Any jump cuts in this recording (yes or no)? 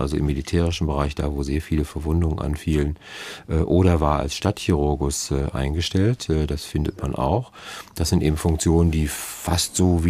no